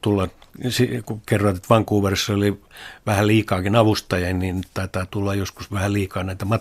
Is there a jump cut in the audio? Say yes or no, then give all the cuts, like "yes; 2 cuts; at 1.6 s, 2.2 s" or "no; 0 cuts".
no; 0 cuts